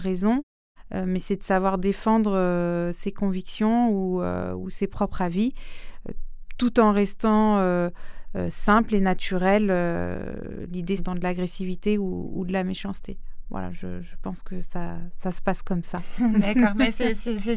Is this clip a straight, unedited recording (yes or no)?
no